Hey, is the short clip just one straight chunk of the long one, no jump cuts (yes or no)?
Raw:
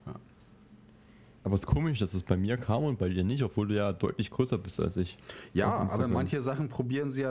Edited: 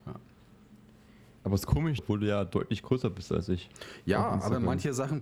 no